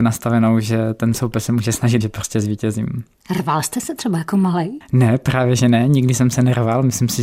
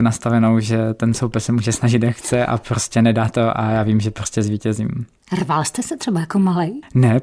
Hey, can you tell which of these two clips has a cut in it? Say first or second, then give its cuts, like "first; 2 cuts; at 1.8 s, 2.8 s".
first; 1 cut; at 2.0 s